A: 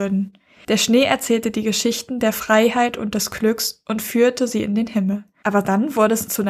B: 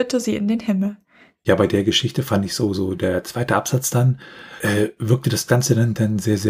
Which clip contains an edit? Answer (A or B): A